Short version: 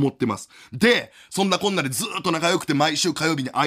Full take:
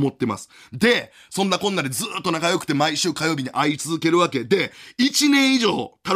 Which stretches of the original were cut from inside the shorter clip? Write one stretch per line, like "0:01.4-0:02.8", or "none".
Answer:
none